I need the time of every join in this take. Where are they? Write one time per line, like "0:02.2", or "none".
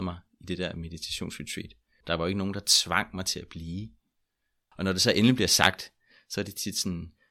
0:02.0
0:04.7